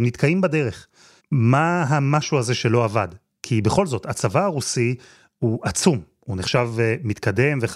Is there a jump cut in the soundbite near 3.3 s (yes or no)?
no